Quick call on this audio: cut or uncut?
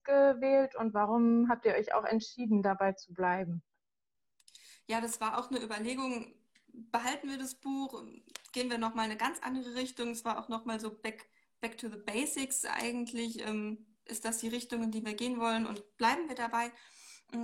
uncut